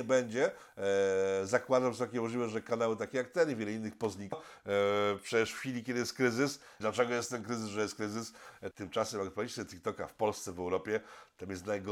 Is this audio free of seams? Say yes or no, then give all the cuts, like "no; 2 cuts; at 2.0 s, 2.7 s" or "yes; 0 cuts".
no; 3 cuts; at 4.3 s, 6.8 s, 8.7 s